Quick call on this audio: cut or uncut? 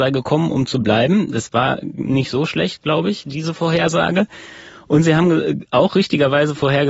uncut